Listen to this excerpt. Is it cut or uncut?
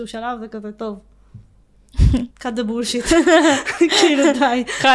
cut